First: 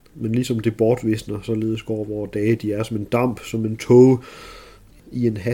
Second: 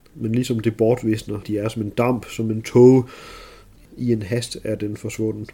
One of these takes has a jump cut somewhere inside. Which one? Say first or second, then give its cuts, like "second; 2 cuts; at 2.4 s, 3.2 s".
second; 1 cut; at 1.4 s